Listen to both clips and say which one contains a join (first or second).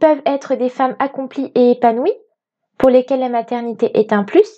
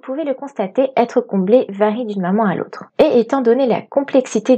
second